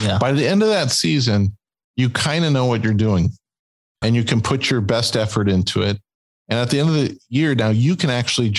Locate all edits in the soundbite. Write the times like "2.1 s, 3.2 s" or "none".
4.0 s

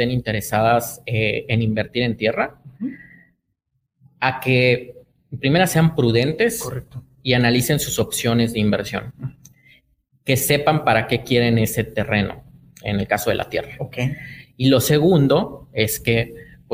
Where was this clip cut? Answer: none

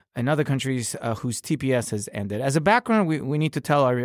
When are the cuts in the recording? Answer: none

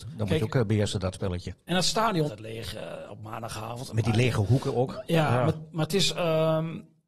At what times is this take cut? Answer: 2.3 s

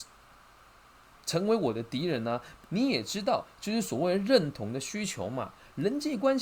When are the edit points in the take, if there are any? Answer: 2.6 s

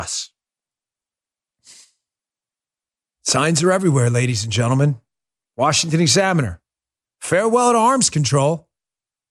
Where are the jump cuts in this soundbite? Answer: 7.0 s

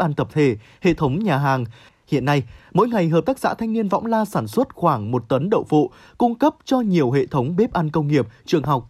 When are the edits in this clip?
1.9 s

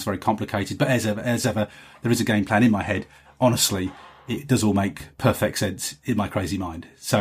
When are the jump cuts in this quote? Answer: none

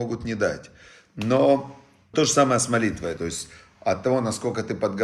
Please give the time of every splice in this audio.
2.1 s, 3.2 s

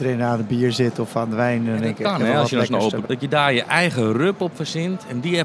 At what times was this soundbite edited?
3.0 s

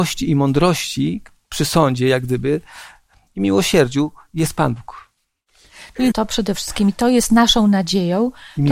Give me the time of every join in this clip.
6.1 s

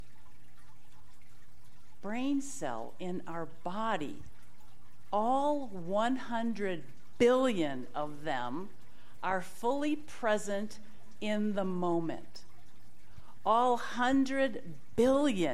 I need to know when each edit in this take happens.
none

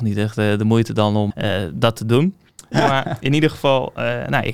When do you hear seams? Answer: 1.3 s, 2.7 s

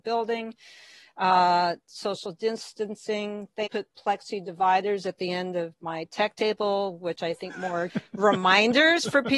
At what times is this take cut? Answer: 3.7 s, 7.9 s

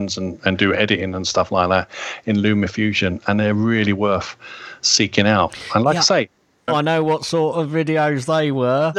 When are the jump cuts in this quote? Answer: 6.7 s

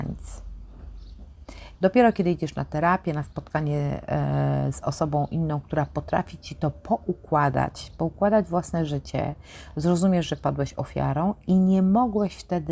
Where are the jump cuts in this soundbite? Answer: 1.8 s

